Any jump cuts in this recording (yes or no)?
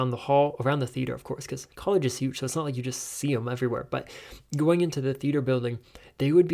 no